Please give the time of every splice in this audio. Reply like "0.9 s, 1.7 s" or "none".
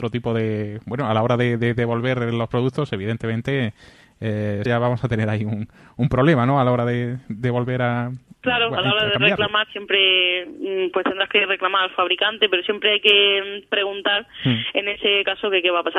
4.7 s